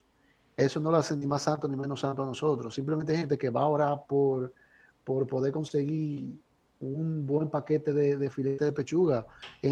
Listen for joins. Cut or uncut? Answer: uncut